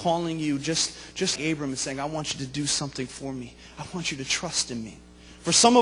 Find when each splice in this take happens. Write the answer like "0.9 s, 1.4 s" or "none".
1.4 s